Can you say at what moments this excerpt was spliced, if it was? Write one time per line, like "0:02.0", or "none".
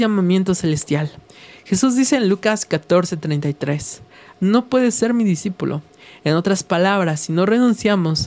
0:04.3